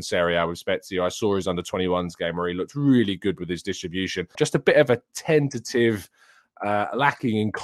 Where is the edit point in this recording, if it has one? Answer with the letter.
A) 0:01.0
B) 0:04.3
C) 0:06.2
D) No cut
B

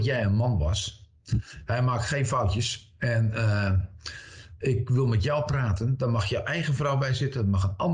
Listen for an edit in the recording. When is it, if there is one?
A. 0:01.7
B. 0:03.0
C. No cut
C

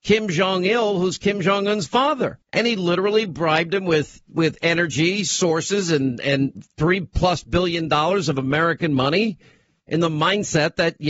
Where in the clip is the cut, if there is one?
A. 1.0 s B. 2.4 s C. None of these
B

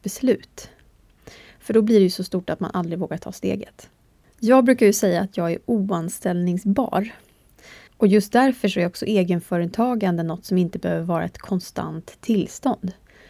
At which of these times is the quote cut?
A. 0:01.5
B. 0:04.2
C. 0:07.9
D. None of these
C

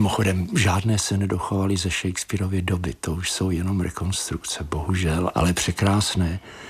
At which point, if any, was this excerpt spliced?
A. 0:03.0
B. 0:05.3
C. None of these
B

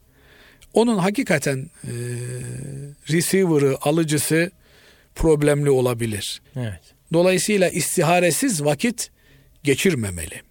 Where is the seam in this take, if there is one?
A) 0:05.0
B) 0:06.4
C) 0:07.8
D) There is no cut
B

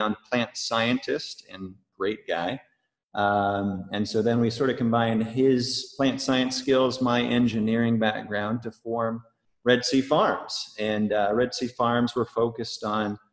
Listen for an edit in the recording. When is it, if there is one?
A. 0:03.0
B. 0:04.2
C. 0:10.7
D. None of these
D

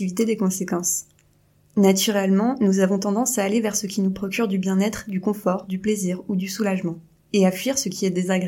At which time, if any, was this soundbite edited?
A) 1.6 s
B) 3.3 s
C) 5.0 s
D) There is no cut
D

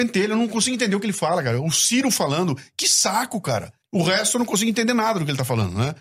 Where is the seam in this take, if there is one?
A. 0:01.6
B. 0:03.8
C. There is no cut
B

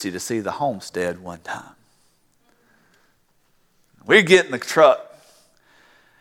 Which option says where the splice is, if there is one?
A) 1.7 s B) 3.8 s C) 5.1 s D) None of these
D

